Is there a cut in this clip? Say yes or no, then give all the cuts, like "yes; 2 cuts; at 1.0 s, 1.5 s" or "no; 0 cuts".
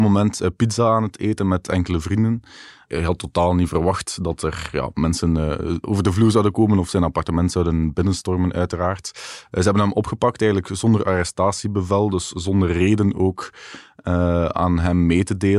no; 0 cuts